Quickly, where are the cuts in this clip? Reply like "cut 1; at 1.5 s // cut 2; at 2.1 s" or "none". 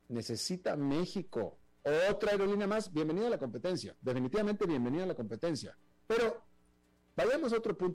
cut 1; at 6.0 s